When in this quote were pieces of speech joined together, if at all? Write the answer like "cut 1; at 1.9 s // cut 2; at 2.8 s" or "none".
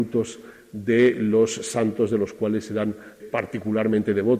cut 1; at 3.2 s